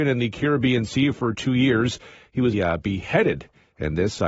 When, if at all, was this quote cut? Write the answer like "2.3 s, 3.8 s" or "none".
2.5 s